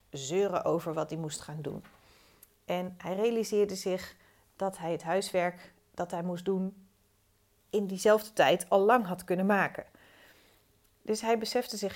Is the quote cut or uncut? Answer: uncut